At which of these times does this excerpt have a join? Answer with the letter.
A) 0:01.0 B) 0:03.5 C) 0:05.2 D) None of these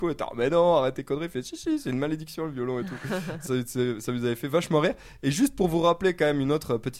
B